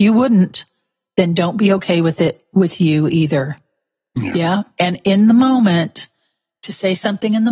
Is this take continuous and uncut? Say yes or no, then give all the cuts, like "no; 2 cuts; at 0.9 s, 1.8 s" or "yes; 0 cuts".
yes; 0 cuts